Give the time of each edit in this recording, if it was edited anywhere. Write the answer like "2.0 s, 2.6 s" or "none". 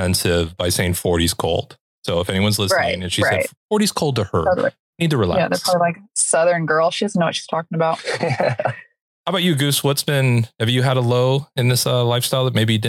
none

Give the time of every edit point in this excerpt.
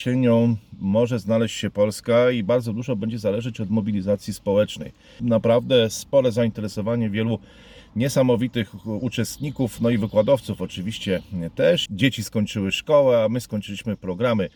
5.2 s, 11.9 s

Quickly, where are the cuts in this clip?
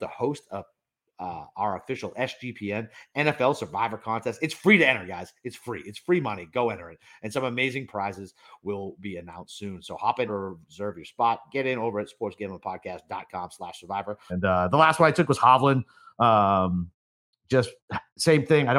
10.3 s, 14.3 s

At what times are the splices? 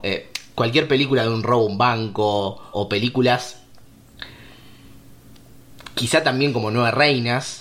2.7 s

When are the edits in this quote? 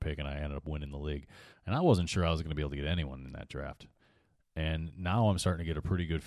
1.5 s

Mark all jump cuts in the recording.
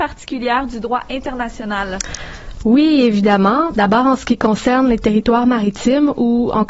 3.7 s

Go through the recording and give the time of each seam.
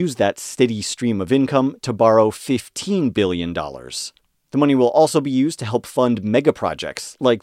none

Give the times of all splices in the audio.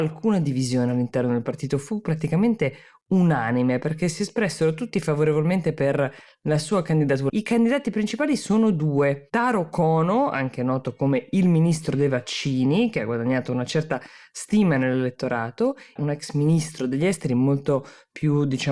7.3 s, 16.0 s

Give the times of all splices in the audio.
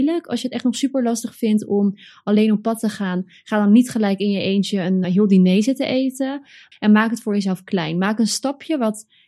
5.0 s, 6.7 s

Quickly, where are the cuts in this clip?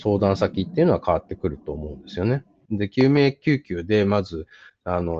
2.7 s

